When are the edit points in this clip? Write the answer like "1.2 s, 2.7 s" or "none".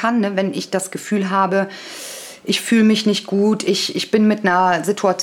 none